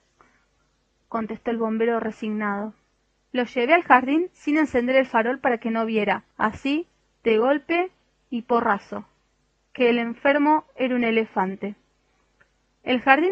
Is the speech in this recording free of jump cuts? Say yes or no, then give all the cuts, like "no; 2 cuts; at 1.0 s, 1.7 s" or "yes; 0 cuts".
no; 1 cut; at 6.3 s